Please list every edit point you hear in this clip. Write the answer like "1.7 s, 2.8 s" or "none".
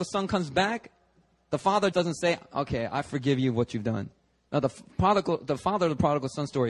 1.9 s